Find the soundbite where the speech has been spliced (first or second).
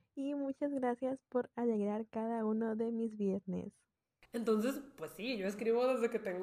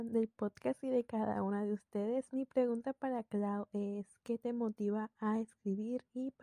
first